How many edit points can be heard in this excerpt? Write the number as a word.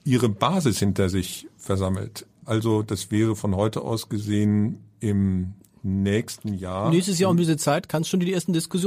one